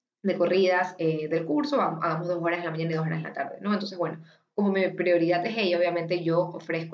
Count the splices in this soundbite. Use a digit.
0